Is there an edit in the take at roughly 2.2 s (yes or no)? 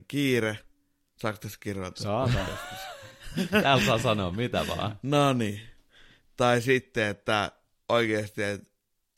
no